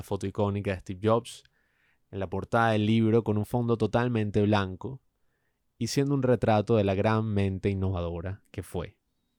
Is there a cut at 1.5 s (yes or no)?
no